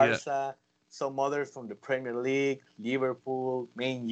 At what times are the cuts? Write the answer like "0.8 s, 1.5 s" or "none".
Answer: none